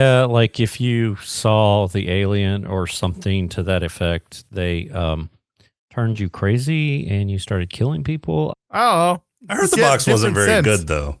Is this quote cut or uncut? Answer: cut